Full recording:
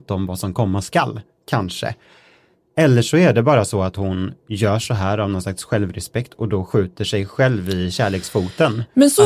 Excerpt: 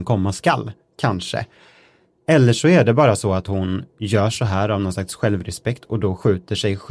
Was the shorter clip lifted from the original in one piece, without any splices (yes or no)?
yes